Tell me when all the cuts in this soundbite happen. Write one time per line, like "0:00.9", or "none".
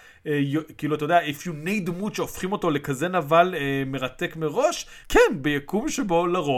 0:05.0